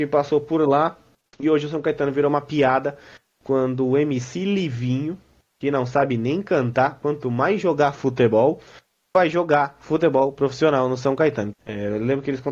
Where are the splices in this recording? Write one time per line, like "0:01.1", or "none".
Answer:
0:11.5